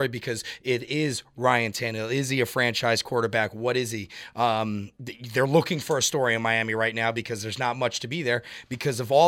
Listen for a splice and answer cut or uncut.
uncut